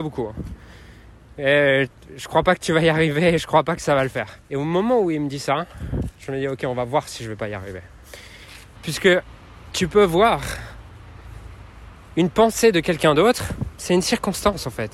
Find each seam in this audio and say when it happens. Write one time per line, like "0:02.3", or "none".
0:04.4
0:08.7